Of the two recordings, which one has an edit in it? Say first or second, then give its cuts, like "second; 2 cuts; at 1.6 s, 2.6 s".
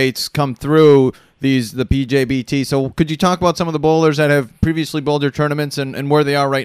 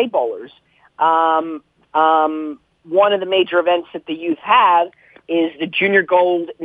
second; 1 cut; at 1.8 s